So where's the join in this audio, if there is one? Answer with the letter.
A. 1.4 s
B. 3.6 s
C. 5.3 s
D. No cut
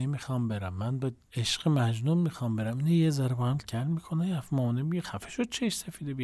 B